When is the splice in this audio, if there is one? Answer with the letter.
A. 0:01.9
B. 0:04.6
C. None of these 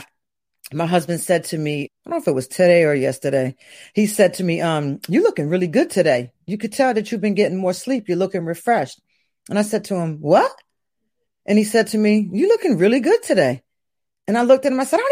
A